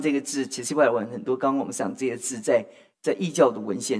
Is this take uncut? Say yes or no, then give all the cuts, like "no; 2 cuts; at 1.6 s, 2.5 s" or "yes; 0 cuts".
yes; 0 cuts